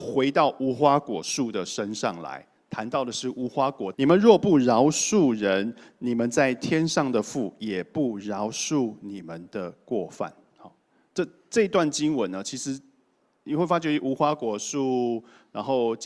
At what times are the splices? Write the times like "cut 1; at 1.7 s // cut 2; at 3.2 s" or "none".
cut 1; at 3.9 s